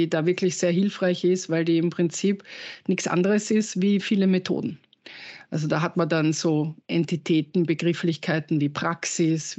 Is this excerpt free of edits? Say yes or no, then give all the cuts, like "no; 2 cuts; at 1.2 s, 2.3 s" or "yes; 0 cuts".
no; 1 cut; at 6.8 s